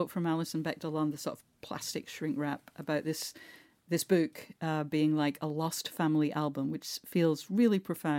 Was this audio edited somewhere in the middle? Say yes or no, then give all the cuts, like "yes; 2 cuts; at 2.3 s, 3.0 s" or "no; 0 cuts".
no; 0 cuts